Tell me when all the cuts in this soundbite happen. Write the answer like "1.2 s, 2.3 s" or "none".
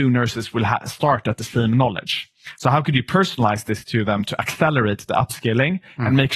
none